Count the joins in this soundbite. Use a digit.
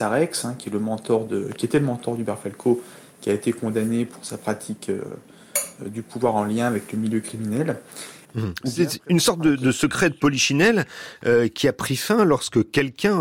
1